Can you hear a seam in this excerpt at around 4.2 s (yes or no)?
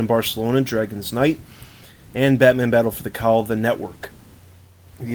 no